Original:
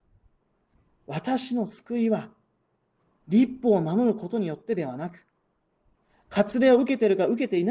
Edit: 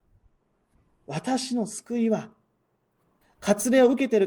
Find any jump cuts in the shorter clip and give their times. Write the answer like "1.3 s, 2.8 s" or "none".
3.2 s

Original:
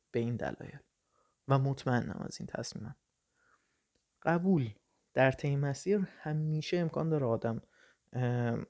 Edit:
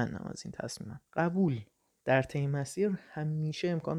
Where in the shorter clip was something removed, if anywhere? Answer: 1.1 s

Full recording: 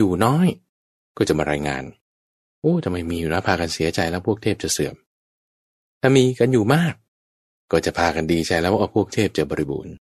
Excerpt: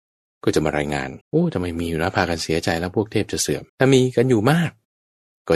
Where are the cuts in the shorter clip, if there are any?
1.2 s, 3.7 s

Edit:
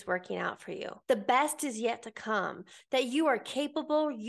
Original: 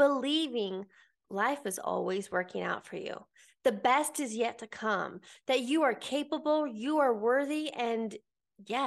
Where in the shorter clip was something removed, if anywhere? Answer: 1.0 s

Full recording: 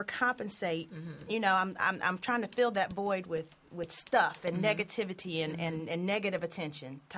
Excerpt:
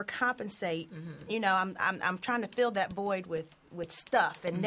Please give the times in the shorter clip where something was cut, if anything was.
none

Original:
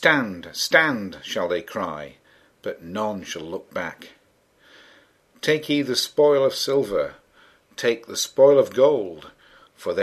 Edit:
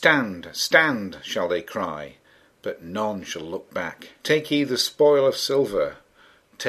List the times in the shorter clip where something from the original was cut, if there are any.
4.2 s

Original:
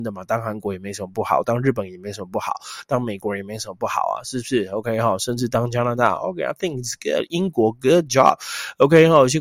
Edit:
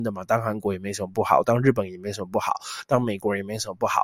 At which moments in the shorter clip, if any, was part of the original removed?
none

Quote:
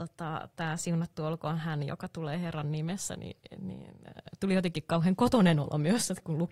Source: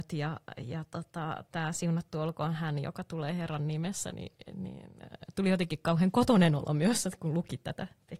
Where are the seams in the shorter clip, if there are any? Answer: none

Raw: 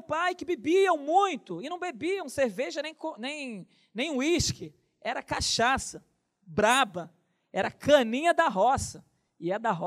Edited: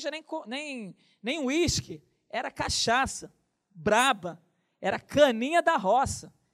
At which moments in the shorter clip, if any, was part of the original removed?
none

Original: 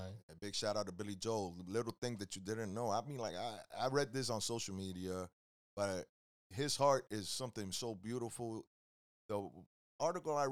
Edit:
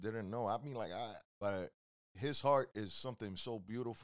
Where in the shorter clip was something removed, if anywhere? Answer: 1.2 s

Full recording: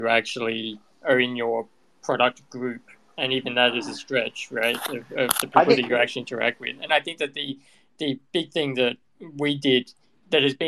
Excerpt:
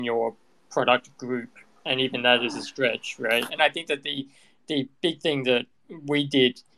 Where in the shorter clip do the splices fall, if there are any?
3.5 s

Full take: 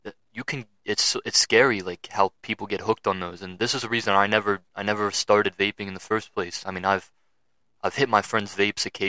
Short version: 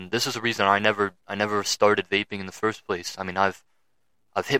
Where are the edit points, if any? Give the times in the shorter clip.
none

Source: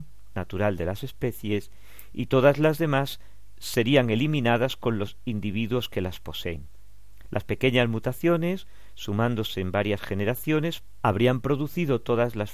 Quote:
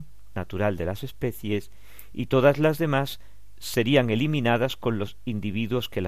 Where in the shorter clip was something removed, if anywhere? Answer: none

